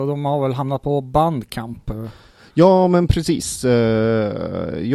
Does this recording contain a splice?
no; 0 cuts

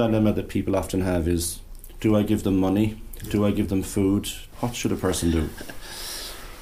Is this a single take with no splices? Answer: no; 1 cut; at 4.5 s

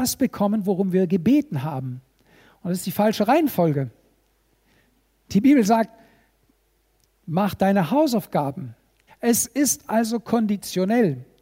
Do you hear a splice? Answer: yes; 1 cut; at 9.1 s

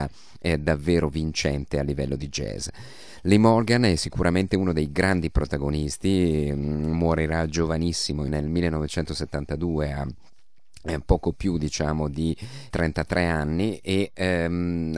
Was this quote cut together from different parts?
yes; 1 cut; at 12.7 s

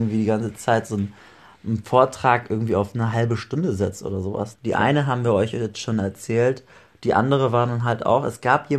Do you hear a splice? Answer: yes; 1 cut; at 4.5 s

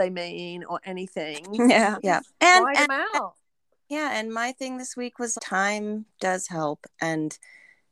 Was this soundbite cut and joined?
yes; 2 cuts; at 2.0 s, 5.4 s

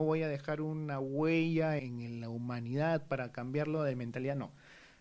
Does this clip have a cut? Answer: yes; 1 cut; at 1.8 s

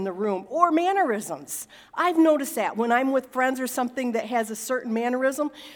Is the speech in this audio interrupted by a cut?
no; 0 cuts

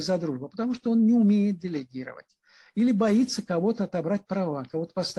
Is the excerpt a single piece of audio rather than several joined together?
yes; 0 cuts

